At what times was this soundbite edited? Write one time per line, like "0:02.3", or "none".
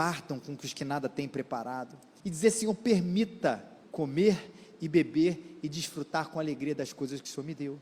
0:02.2
0:03.8